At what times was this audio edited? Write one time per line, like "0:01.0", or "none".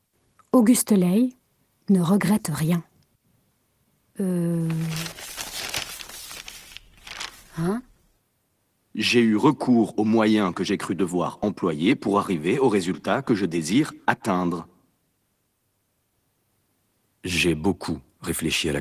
0:04.0